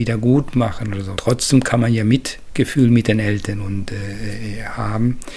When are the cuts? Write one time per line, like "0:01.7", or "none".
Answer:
0:01.2